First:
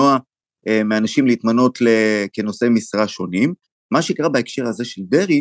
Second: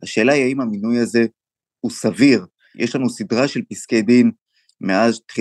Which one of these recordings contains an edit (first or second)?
first